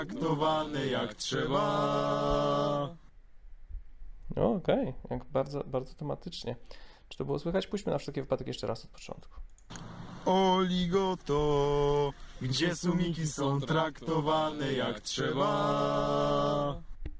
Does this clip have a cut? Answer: no; 0 cuts

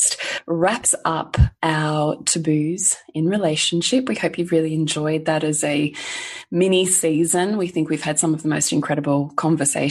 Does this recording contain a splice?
no; 0 cuts

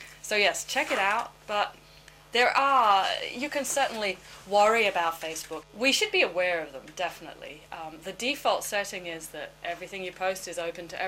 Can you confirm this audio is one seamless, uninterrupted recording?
no; 1 cut; at 5.6 s

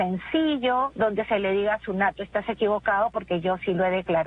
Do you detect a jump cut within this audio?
yes; 1 cut; at 0.9 s

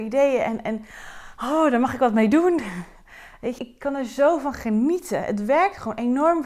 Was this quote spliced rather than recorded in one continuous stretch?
yes; 1 cut; at 3.6 s

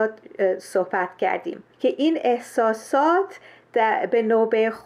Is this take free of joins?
no; 1 cut; at 1.7 s

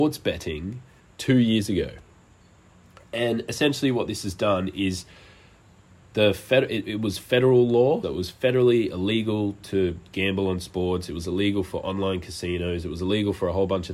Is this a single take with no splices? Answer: no; 1 cut; at 8.0 s

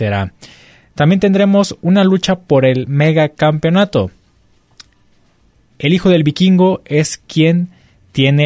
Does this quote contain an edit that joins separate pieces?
no; 0 cuts

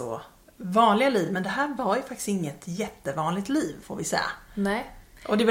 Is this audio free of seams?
yes; 0 cuts

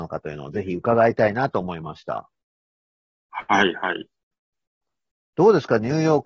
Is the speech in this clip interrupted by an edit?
no; 0 cuts

